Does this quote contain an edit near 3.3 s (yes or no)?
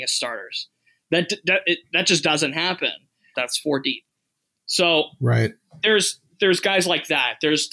yes